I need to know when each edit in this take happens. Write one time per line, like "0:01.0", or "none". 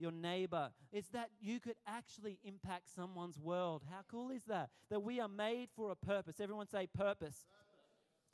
0:00.9